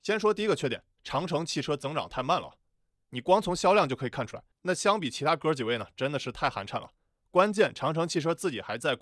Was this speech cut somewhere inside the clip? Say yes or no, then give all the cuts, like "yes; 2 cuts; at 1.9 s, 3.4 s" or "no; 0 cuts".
yes; 1 cut; at 4.5 s